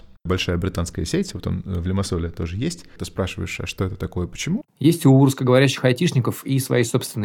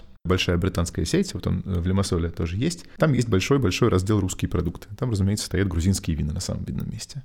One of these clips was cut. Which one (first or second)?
first